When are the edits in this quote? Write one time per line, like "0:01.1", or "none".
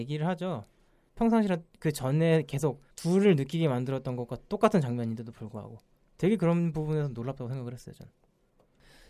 0:01.1
0:02.9